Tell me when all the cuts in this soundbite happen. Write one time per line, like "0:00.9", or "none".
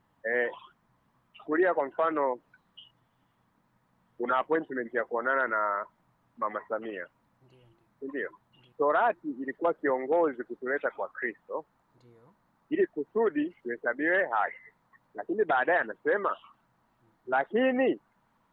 0:08.7
0:13.6